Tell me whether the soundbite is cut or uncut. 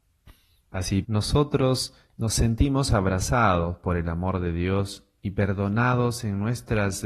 cut